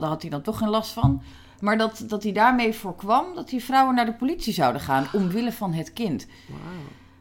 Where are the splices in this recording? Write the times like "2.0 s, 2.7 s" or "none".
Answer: none